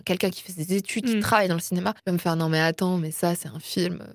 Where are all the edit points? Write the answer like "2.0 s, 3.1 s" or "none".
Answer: 2.0 s